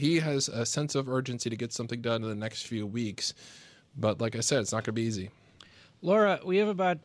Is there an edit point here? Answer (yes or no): no